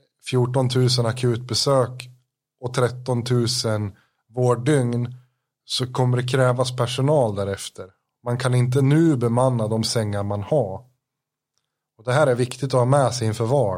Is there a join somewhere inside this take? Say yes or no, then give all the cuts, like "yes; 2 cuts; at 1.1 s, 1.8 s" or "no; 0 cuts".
no; 0 cuts